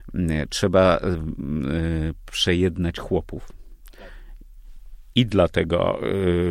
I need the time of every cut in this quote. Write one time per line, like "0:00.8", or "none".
0:05.1